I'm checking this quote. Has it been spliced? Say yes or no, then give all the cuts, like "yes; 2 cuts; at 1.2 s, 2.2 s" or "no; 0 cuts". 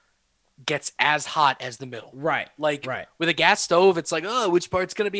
no; 0 cuts